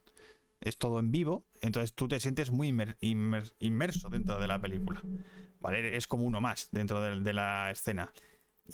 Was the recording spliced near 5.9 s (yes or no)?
no